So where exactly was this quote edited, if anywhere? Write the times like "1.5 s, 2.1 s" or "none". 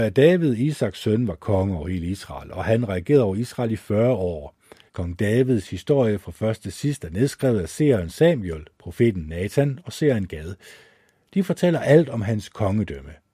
4.9 s

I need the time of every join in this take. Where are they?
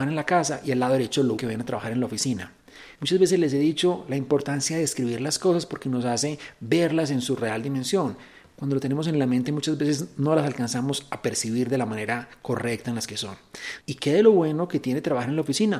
1.4 s, 2.9 s, 13.8 s

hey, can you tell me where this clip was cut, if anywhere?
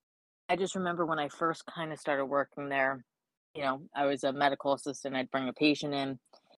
none

